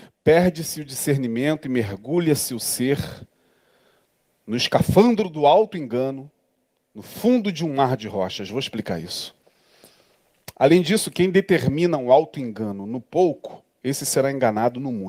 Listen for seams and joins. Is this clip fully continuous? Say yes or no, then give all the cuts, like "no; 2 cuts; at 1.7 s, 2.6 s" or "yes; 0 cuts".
yes; 0 cuts